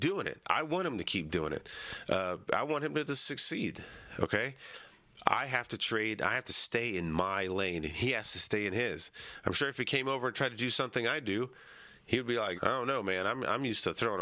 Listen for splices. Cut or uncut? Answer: cut